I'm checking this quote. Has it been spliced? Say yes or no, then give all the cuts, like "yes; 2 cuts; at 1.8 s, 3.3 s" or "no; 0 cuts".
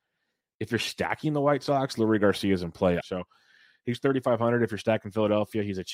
yes; 1 cut; at 3.0 s